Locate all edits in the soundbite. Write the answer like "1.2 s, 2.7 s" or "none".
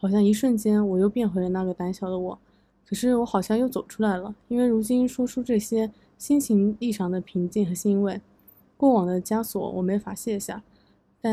none

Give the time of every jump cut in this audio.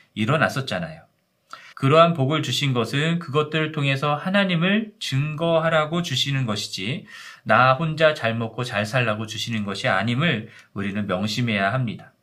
1.7 s

